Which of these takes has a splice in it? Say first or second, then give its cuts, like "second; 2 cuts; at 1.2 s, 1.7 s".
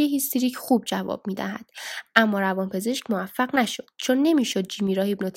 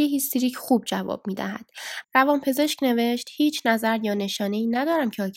second; 1 cut; at 2.0 s